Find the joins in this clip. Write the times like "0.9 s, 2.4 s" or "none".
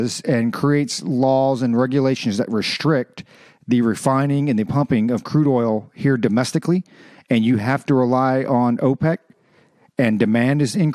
none